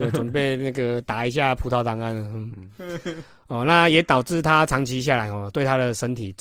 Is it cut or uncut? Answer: uncut